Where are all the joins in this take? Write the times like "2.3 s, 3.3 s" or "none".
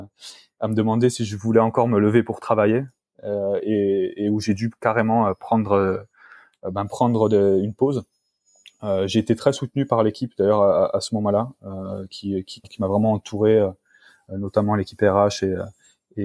12.6 s